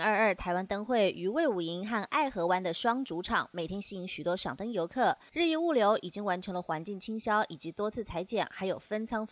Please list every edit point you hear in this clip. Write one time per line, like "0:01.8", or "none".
0:05.3